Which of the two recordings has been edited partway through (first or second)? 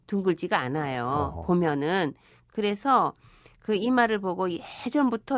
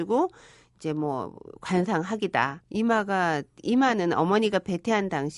second